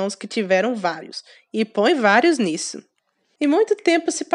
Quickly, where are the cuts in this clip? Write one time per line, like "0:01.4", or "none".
0:03.4